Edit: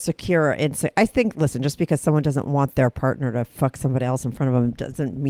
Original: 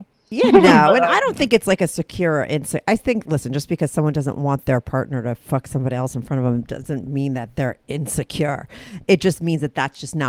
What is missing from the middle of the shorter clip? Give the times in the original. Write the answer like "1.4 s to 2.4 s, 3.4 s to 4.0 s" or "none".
none